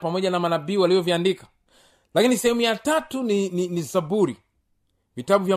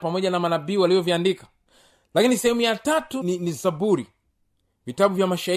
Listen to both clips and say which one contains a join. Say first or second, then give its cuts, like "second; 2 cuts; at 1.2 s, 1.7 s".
second; 1 cut; at 3.2 s